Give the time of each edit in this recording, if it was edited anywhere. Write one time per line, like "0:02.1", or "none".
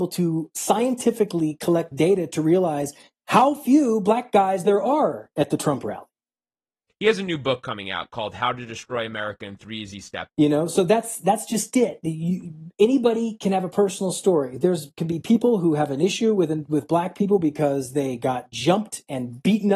0:06.9
0:10.3
0:12.7